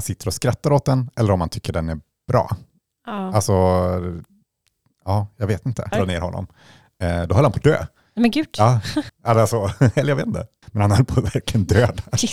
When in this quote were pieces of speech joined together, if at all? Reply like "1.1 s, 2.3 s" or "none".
5.9 s, 9.1 s, 10.6 s